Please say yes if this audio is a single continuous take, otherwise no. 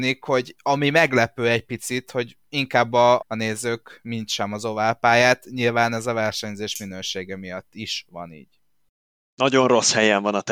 no